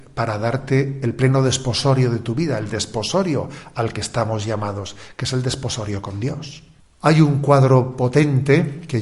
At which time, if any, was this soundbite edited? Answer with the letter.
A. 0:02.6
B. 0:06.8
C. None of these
B